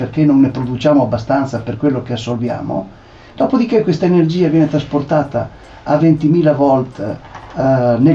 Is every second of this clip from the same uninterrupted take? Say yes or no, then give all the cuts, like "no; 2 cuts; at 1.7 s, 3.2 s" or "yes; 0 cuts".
yes; 0 cuts